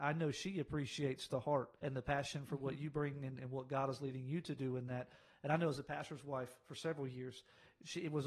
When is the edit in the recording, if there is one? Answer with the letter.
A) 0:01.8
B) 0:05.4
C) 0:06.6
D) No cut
A